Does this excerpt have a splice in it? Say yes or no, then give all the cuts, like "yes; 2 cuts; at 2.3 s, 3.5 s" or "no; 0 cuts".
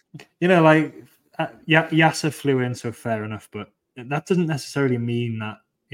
no; 0 cuts